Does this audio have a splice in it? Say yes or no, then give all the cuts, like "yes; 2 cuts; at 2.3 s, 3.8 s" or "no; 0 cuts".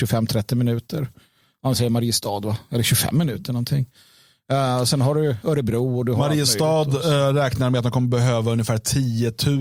no; 0 cuts